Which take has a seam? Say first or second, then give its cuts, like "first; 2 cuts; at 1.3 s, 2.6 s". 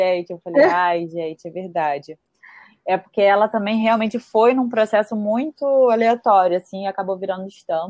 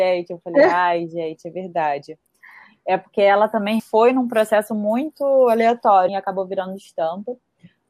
second; 2 cuts; at 3.8 s, 6.1 s